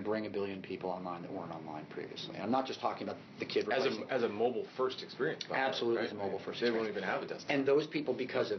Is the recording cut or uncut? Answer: uncut